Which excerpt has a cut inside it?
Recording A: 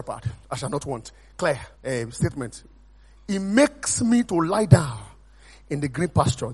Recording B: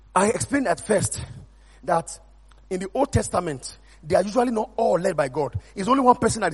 A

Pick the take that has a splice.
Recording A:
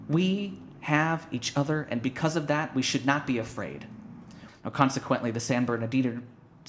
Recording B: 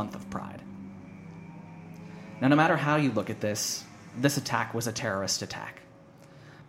A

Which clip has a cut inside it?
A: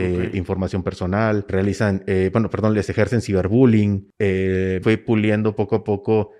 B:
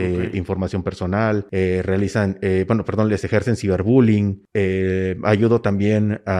A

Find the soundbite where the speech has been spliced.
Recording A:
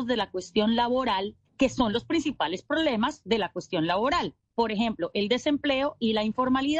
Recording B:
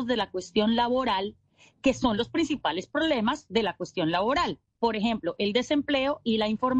A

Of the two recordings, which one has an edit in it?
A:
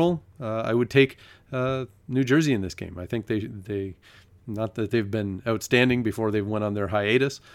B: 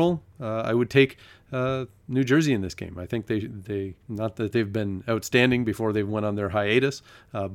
B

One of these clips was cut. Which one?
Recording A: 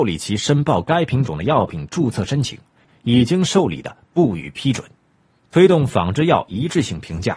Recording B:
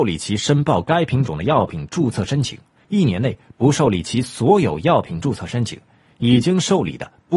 A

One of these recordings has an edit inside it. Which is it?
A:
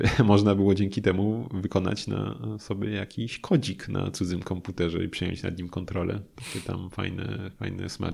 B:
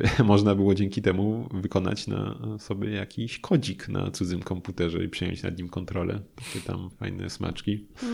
B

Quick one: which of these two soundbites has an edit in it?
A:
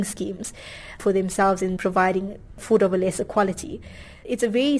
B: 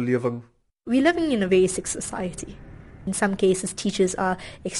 A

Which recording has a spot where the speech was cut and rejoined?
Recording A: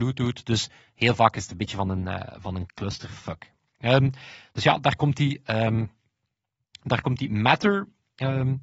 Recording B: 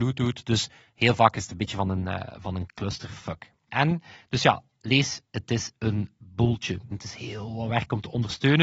B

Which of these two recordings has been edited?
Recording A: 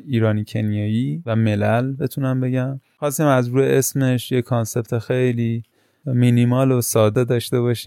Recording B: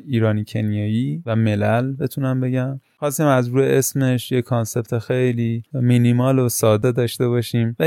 B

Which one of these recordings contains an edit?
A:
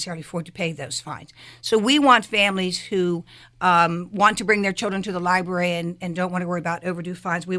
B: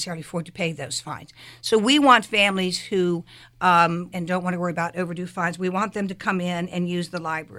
B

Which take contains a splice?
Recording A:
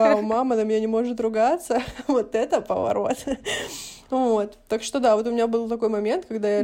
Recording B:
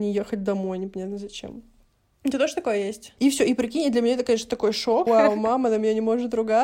B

